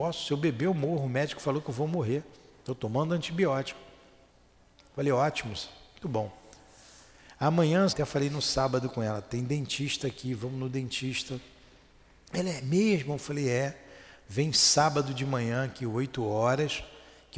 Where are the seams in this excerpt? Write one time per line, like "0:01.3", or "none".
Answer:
0:06.0
0:07.9

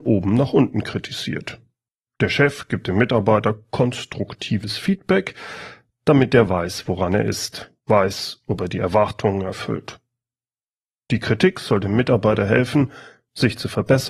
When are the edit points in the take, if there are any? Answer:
0:07.8

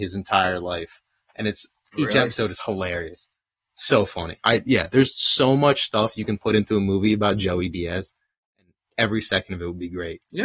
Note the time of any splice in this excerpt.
none

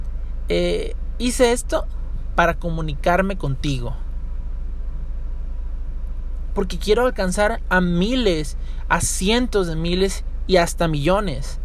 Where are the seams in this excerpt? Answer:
0:06.5

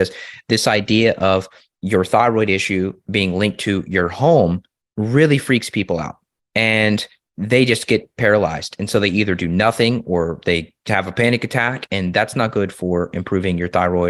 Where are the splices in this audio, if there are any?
none

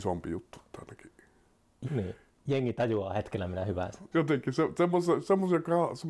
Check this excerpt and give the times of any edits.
0:01.8
0:04.1

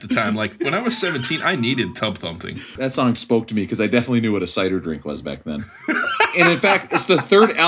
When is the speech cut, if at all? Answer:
0:02.8

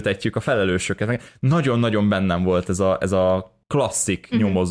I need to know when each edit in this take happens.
0:03.6

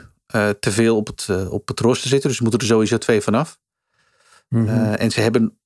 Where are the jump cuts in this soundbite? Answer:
none

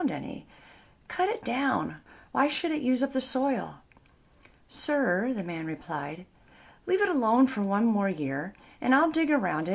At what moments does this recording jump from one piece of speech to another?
none

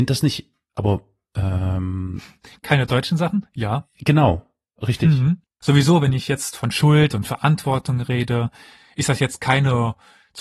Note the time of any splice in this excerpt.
0:05.4

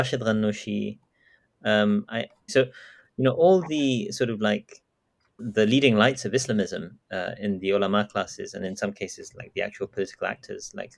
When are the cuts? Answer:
0:02.5
0:05.4

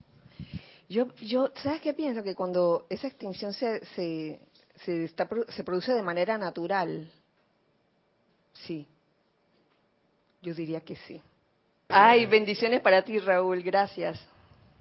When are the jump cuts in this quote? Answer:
0:11.9

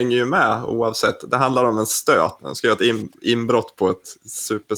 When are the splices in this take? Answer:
0:02.4

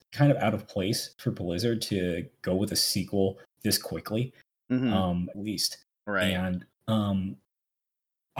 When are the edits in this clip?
0:05.3

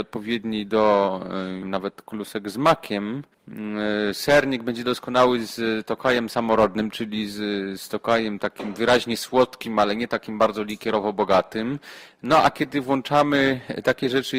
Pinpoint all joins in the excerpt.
0:01.6

